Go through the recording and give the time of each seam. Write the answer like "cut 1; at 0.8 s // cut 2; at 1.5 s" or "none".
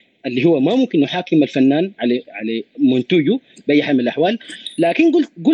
cut 1; at 2.3 s